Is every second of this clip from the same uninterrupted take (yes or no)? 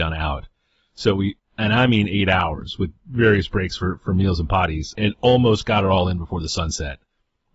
no